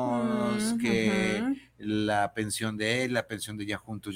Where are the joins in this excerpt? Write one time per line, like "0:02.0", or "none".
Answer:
none